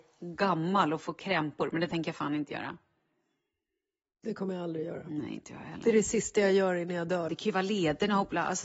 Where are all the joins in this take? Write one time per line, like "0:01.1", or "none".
0:07.3